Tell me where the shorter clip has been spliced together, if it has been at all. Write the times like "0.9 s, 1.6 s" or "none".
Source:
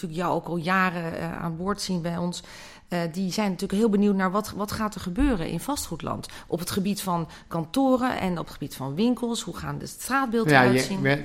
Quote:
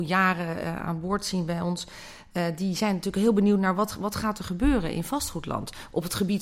none